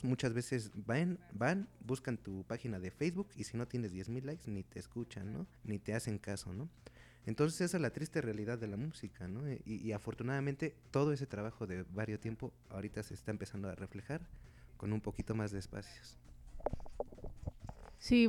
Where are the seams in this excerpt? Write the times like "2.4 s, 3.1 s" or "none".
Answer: 5.6 s

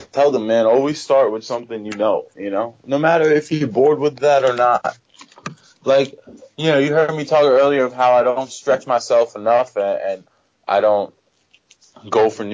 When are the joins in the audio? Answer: none

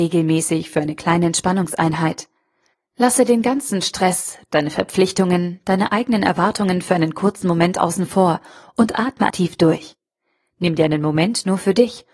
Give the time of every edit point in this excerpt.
9.3 s

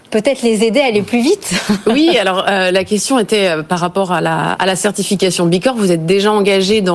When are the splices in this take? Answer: 4.5 s

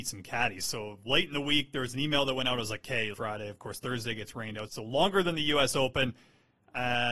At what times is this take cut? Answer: 3.1 s, 4.7 s

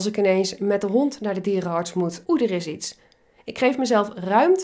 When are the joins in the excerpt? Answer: 2.2 s

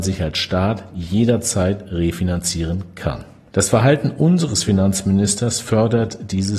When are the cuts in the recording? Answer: 3.5 s

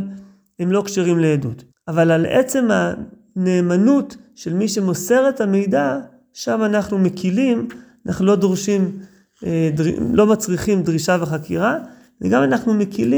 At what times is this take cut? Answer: 1.7 s

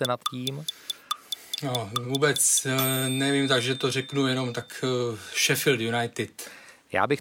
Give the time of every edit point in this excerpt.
none

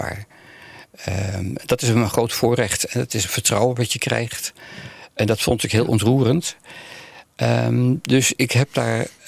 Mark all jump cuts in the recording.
none

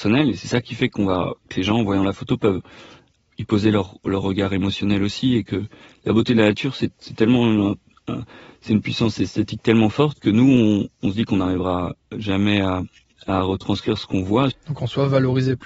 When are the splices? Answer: 14.5 s

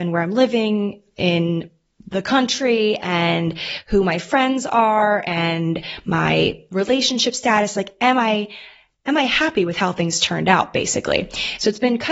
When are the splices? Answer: none

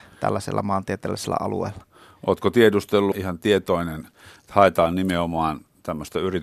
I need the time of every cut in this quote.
3.1 s

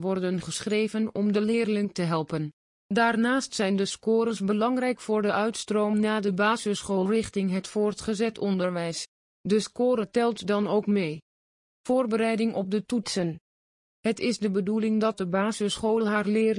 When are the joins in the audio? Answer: none

